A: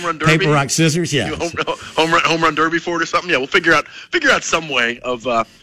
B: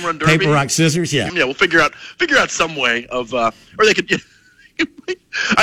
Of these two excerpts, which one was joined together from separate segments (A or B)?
B